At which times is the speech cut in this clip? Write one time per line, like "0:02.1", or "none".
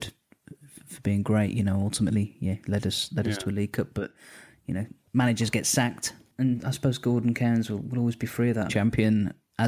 0:08.7